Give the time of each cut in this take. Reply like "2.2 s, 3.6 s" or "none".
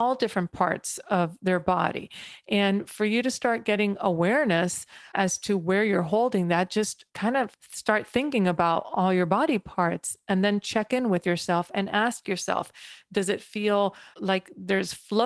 7.1 s